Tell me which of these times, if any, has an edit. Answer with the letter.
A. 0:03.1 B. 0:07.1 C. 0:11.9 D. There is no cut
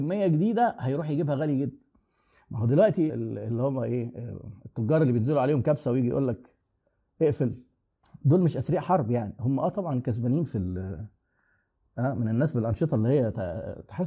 A